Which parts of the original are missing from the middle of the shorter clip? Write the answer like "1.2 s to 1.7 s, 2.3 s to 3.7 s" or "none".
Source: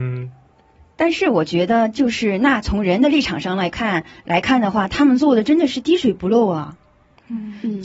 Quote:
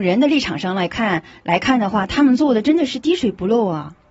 none